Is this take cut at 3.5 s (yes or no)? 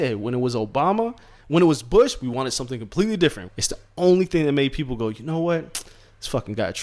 yes